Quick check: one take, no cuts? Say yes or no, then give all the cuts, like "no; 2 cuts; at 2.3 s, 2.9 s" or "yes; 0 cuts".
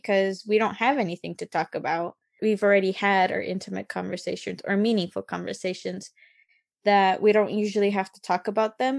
yes; 0 cuts